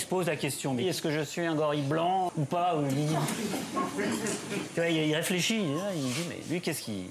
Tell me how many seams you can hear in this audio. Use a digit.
1